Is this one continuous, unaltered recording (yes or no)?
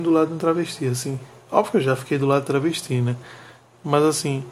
yes